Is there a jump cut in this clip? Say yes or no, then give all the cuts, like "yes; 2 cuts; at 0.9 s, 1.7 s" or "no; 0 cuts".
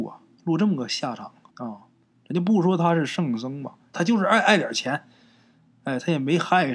yes; 2 cuts; at 1.5 s, 3.9 s